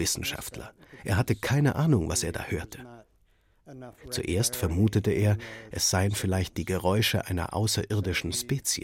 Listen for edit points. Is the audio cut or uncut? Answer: uncut